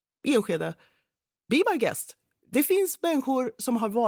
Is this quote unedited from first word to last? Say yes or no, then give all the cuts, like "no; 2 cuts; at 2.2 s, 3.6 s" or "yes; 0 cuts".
yes; 0 cuts